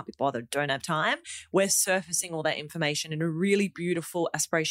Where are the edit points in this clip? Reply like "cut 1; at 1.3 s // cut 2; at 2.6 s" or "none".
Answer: none